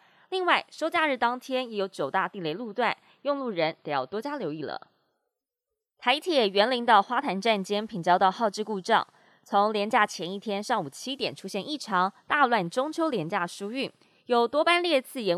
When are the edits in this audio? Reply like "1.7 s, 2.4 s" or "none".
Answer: none